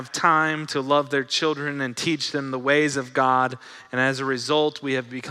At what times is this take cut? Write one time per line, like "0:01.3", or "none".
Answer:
none